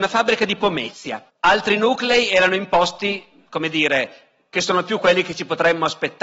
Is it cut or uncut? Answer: cut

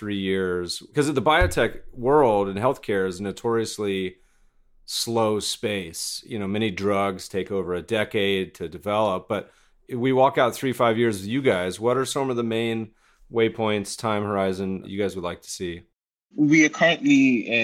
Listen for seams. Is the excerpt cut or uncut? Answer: uncut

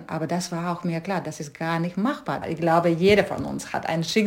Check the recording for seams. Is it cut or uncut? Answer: cut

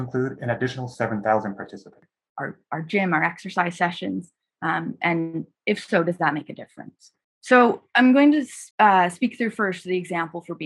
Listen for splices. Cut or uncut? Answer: cut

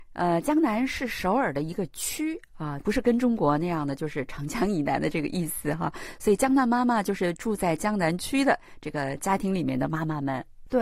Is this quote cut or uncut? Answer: cut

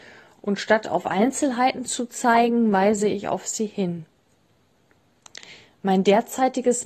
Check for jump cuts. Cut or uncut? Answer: uncut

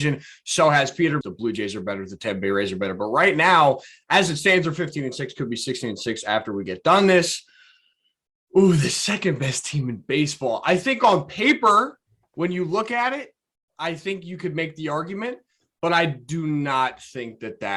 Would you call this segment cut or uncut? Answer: cut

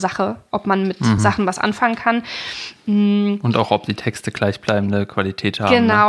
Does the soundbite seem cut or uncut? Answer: uncut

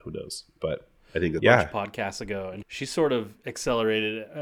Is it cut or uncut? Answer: cut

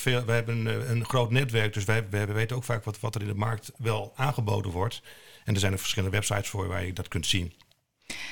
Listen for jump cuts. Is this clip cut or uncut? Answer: uncut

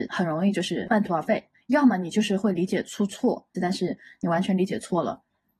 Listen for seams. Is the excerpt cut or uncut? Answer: cut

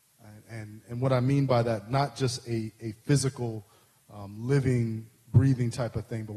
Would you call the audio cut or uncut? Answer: uncut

